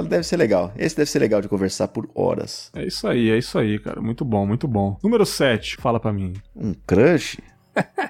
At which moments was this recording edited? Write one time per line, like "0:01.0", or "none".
0:05.8